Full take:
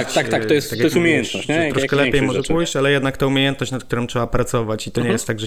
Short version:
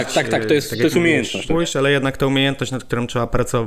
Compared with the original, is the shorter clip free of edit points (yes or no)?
no